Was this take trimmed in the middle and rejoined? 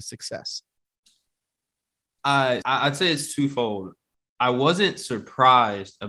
yes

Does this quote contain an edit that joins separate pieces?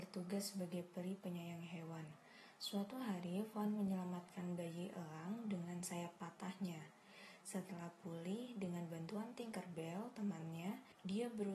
no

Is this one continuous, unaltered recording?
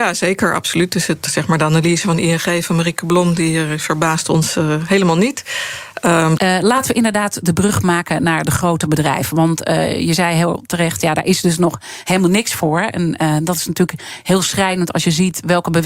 no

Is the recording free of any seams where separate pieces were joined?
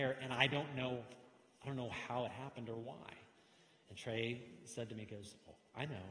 yes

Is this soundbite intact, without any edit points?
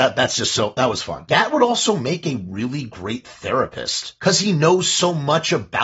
yes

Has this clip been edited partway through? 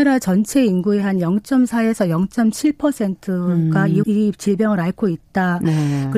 yes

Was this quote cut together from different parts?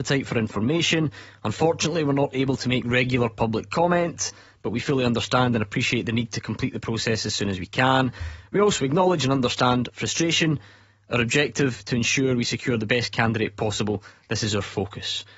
no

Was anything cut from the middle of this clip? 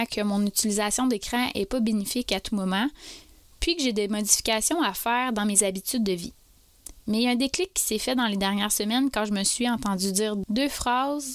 no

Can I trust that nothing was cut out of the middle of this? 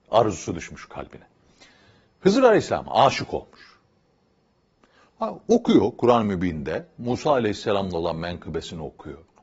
yes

